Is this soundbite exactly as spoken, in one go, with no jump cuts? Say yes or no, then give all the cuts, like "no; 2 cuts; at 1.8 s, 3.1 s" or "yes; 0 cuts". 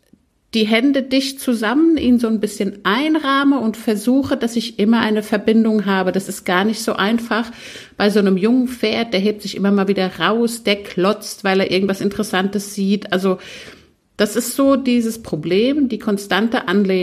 yes; 0 cuts